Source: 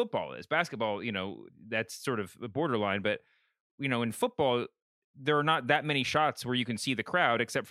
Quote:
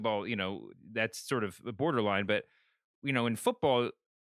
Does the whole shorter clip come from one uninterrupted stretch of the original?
yes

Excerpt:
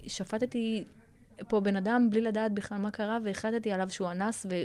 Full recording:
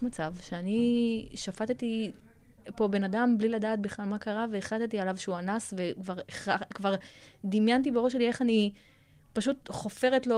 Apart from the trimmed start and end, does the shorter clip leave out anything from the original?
no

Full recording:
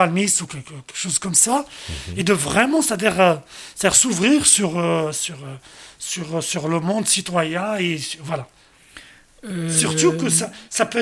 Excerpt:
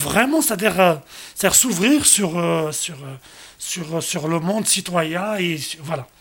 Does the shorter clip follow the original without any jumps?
yes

